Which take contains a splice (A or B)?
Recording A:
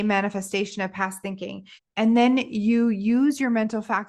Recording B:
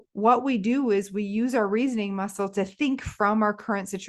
A